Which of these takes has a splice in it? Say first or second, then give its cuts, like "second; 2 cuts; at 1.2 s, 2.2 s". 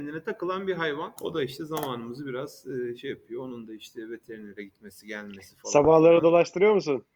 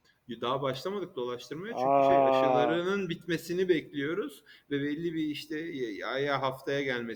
first; 1 cut; at 1.2 s